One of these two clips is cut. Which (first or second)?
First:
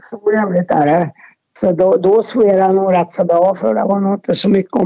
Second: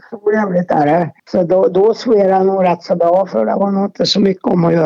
second